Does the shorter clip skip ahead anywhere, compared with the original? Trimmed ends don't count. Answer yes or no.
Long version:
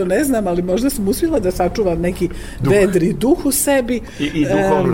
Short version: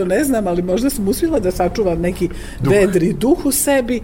no